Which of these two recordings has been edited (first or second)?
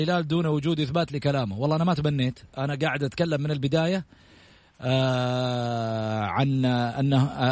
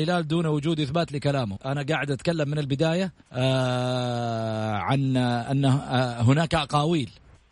second